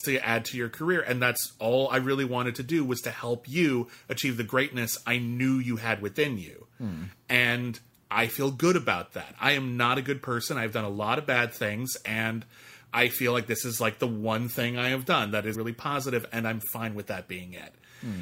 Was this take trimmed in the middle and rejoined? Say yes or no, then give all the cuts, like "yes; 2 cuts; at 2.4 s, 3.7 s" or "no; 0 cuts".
yes; 1 cut; at 15.5 s